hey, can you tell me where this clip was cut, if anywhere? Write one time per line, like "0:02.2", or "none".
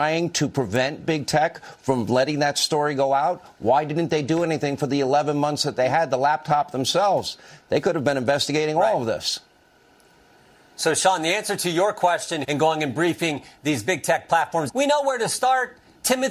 0:12.4
0:14.7